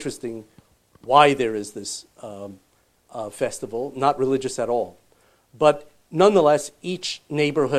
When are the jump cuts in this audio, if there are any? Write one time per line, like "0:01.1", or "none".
none